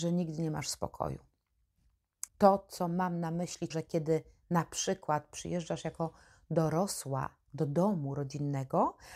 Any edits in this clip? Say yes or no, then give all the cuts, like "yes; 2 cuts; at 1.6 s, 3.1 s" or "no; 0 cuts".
yes; 2 cuts; at 2.3 s, 3.7 s